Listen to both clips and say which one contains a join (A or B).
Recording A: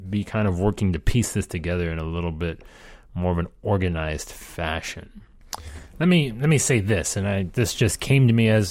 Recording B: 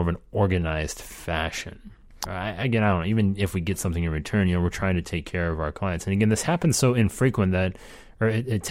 B